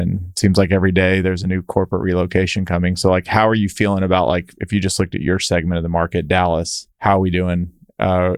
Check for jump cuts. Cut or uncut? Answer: cut